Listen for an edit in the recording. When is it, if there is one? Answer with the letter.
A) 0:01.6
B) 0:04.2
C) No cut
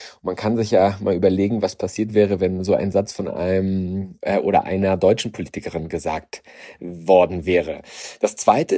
C